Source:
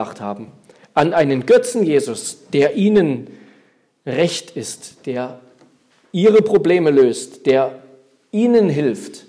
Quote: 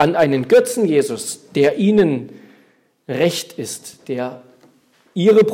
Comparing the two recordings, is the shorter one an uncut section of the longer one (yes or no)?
yes